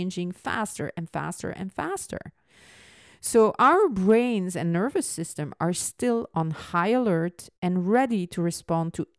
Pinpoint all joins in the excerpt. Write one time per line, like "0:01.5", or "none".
none